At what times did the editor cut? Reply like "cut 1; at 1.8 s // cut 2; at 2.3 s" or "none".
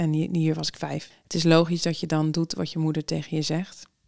cut 1; at 1.1 s